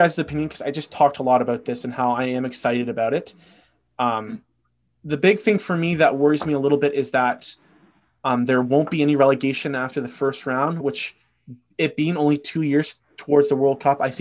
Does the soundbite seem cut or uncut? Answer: uncut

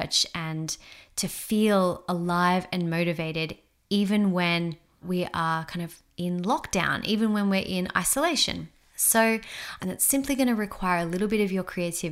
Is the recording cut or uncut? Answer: cut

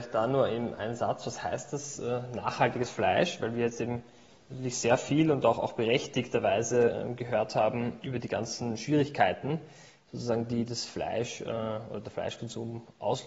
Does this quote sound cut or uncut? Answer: uncut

